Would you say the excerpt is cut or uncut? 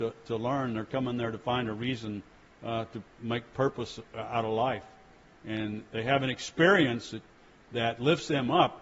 uncut